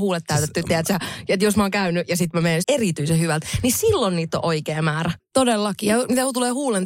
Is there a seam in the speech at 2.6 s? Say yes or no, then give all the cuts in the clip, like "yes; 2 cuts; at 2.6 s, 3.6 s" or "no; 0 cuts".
yes; 2 cuts; at 2.6 s, 5.2 s